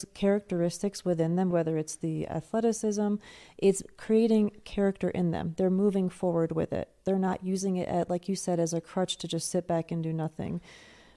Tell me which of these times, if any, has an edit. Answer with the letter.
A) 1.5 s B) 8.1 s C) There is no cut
A